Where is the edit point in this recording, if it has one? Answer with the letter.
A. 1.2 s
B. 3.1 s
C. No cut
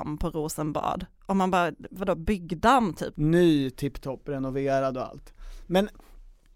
B